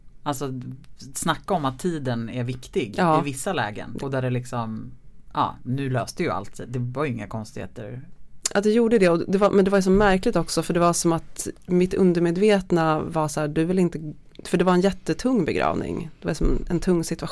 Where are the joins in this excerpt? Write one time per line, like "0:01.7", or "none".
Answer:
0:04.0

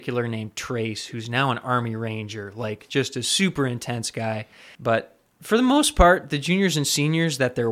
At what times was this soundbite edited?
0:04.7

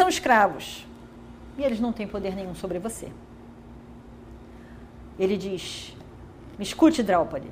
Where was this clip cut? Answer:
0:05.1

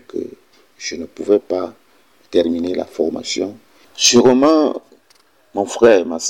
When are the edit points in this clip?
0:03.8

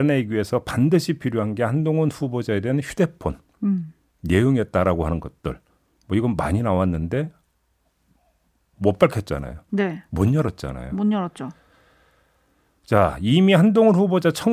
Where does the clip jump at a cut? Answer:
none

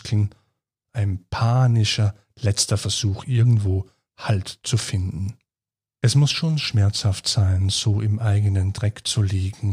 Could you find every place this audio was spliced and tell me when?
0:05.8

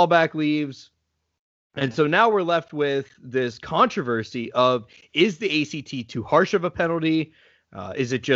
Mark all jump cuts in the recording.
none

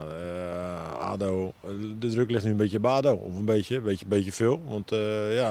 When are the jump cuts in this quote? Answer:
none

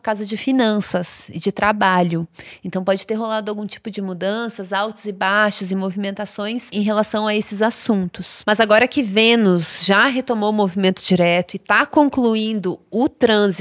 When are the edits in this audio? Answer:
none

